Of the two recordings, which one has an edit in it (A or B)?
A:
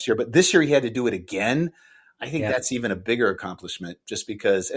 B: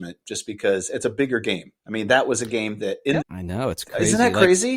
B